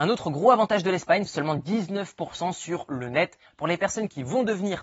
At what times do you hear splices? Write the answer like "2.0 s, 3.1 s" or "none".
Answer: 1.2 s, 3.5 s